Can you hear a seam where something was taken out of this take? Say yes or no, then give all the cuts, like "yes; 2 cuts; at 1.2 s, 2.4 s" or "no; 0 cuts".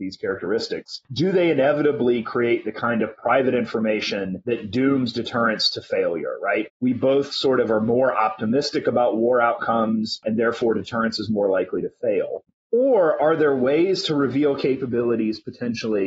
yes; 1 cut; at 6.7 s